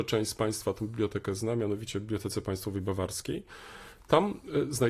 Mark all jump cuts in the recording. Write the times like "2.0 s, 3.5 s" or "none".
none